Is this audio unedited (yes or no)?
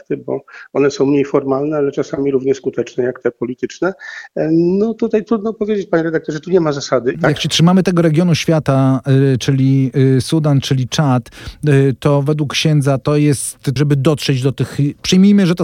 no